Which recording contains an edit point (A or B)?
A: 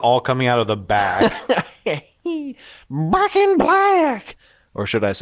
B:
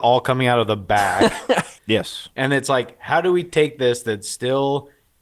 B